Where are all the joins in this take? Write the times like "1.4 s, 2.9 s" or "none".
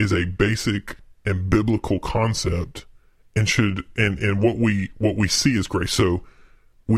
none